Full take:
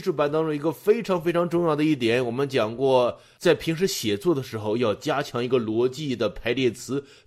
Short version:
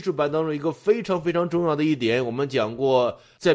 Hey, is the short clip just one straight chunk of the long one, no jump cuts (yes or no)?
yes